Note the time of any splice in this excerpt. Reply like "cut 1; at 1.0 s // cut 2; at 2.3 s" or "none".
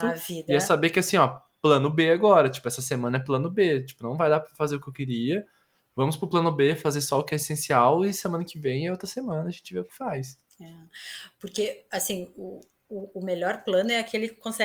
none